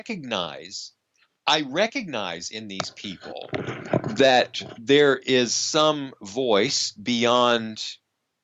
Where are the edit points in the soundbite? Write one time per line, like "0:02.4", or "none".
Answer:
none